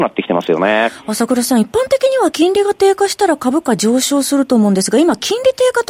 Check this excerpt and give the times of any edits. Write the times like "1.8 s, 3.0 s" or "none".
none